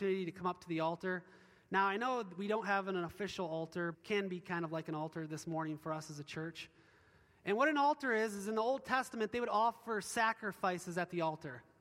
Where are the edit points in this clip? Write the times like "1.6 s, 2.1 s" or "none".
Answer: 3.9 s